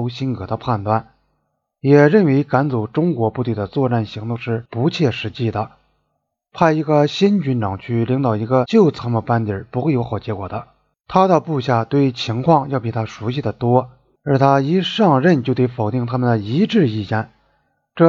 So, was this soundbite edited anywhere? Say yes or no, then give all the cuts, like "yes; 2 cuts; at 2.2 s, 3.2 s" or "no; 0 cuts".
no; 0 cuts